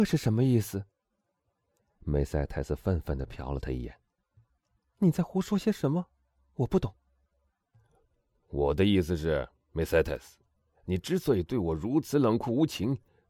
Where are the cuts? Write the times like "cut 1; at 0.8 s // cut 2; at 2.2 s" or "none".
none